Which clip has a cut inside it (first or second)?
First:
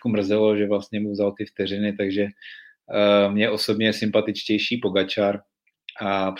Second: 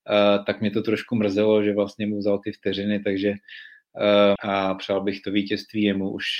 second